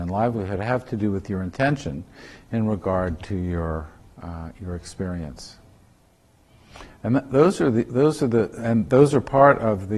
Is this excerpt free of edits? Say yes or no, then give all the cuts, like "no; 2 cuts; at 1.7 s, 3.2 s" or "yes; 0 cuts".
yes; 0 cuts